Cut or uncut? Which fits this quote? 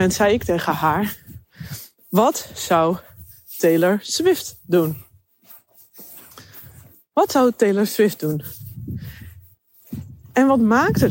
uncut